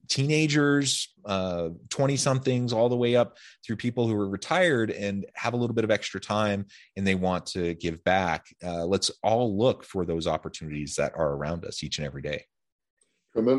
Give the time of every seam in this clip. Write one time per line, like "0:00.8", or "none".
none